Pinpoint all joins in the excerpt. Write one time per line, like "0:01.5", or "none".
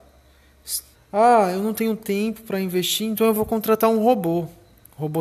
0:00.9